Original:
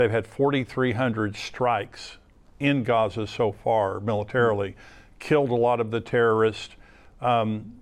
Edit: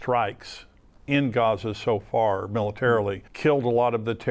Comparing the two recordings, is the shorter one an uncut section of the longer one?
no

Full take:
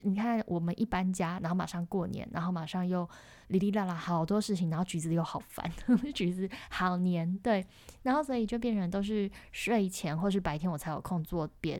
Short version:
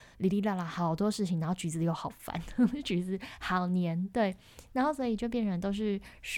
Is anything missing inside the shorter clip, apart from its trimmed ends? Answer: no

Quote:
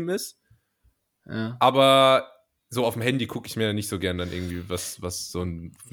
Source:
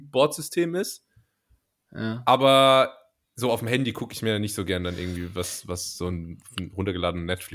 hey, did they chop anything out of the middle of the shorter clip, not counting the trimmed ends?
no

